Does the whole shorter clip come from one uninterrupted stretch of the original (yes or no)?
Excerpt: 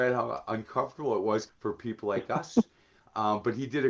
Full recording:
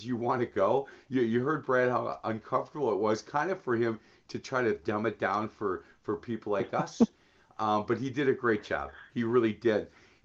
no